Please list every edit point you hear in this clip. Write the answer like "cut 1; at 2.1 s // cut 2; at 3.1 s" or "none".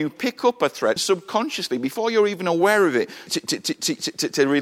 cut 1; at 1.0 s // cut 2; at 3.3 s